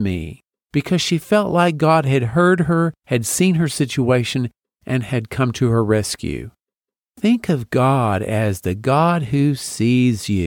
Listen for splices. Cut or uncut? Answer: uncut